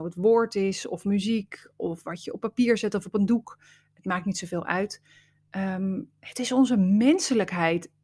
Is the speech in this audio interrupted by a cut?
no; 0 cuts

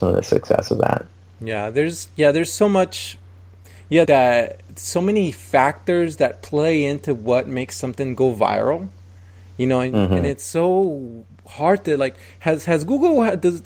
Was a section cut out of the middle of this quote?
yes; 1 cut; at 4.1 s

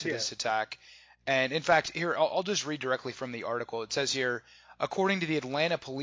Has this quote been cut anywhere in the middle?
no; 0 cuts

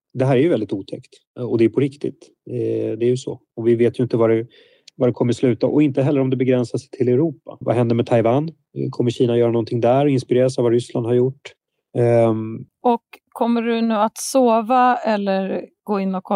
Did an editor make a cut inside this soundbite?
yes; 2 cuts; at 7.6 s, 12.7 s

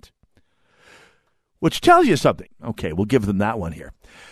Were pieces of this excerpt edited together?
yes; 1 cut; at 2.5 s

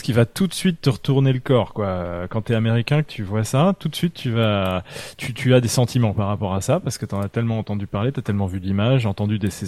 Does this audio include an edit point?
no; 0 cuts

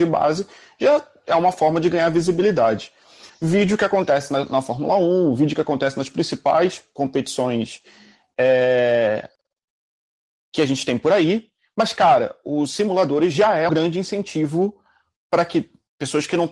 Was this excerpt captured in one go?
no; 2 cuts; at 3.3 s, 13.7 s

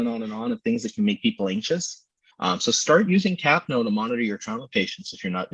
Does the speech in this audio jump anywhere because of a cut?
yes; 1 cut; at 2.3 s

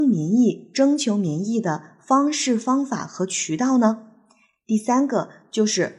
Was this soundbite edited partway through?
no; 0 cuts

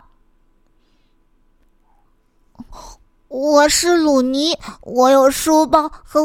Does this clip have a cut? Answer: yes; 1 cut; at 2.1 s

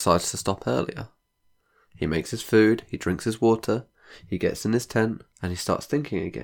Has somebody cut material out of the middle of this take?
yes; 1 cut; at 5.3 s

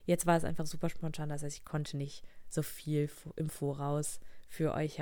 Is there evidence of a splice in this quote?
no; 0 cuts

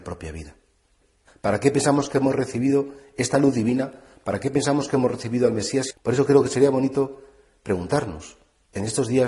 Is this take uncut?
no; 2 cuts; at 1.3 s, 5.9 s

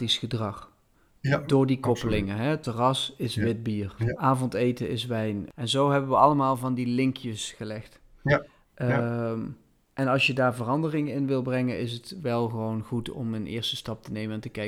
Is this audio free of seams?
yes; 0 cuts

